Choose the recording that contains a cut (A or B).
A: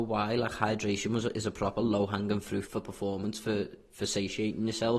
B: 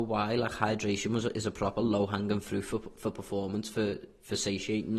A